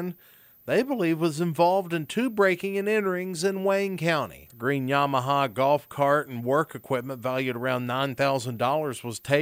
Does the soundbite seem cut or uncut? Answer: cut